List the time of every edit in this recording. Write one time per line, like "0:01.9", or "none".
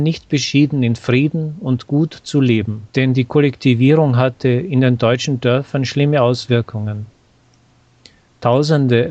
0:02.9